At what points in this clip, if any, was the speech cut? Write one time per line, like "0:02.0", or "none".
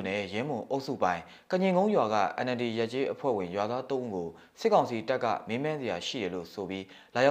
none